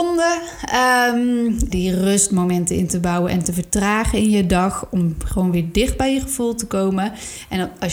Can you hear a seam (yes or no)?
yes